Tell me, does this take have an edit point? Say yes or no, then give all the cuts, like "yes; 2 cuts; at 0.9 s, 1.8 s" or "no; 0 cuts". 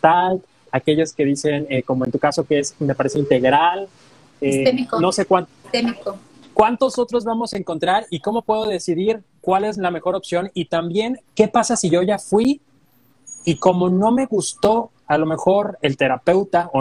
yes; 2 cuts; at 5.6 s, 11.3 s